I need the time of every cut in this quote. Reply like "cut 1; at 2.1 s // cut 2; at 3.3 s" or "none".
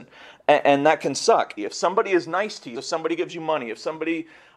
cut 1; at 1.6 s // cut 2; at 2.7 s